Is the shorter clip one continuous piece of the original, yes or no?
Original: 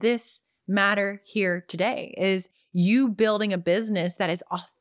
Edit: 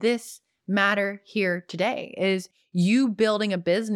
yes